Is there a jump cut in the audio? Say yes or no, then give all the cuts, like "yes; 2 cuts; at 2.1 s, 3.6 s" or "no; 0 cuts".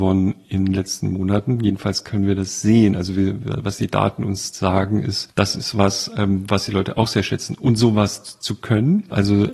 no; 0 cuts